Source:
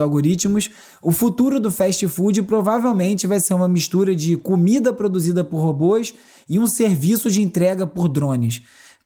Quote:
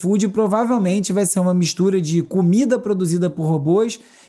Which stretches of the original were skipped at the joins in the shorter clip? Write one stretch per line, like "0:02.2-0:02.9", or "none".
none